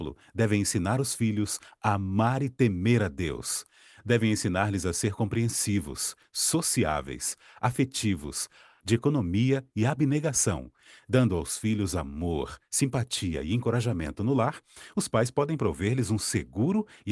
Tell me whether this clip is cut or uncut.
cut